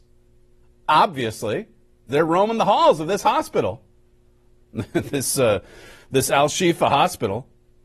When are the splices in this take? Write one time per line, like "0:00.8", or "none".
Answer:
0:02.1